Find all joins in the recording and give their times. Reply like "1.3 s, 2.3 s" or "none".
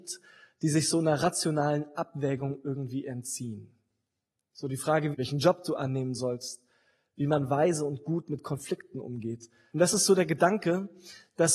5.1 s, 9.7 s